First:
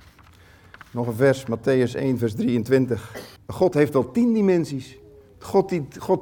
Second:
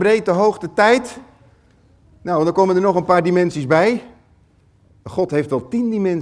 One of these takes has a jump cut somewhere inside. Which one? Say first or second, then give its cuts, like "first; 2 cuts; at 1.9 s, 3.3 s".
first; 1 cut; at 3.4 s